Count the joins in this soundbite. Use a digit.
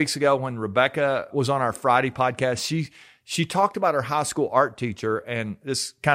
1